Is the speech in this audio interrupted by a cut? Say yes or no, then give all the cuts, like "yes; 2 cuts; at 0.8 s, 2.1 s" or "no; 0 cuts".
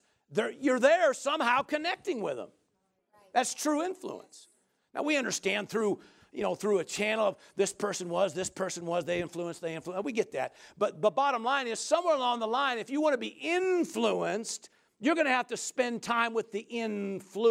no; 0 cuts